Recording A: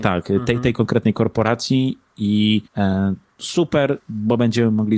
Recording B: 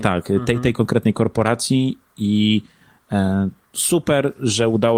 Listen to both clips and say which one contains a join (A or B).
A